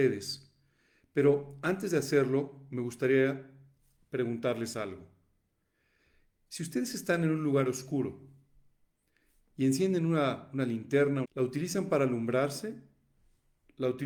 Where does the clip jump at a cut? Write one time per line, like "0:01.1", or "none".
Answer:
0:11.2